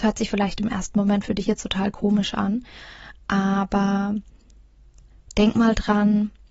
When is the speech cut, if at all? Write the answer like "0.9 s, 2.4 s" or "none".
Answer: none